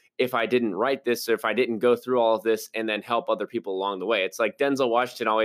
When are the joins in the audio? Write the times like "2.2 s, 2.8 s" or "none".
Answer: none

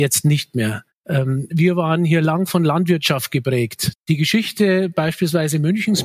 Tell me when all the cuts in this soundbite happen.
0.9 s, 3.9 s

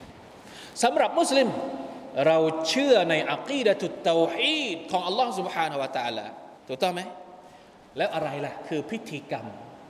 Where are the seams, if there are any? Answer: 6.6 s

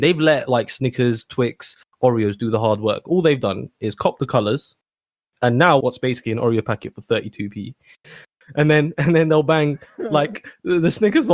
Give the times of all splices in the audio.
5.8 s, 8.0 s

